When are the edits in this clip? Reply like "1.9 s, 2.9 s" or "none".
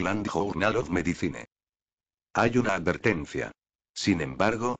3.8 s